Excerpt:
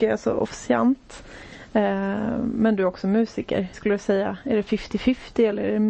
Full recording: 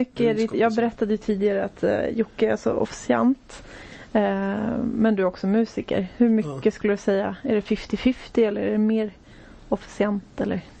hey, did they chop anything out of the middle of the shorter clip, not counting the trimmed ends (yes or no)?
yes